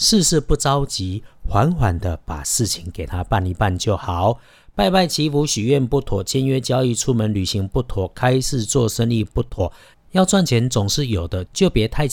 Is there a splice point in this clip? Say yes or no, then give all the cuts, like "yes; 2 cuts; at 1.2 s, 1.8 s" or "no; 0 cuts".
no; 0 cuts